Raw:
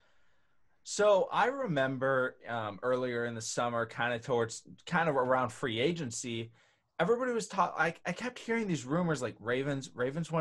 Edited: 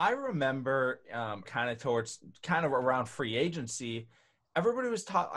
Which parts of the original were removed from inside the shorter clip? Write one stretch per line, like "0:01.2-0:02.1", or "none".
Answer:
0:02.8-0:03.9